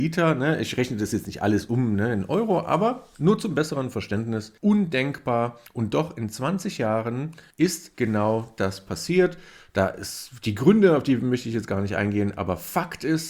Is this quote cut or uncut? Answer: cut